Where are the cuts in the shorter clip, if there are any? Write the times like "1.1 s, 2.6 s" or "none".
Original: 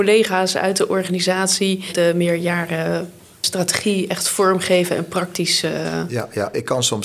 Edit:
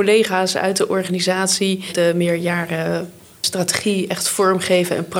none